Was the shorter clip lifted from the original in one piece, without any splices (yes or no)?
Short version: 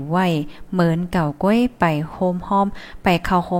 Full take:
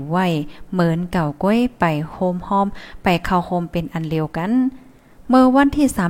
yes